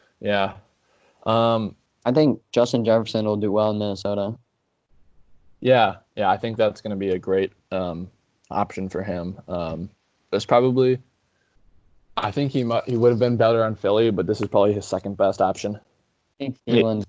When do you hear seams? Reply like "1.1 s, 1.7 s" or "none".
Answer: none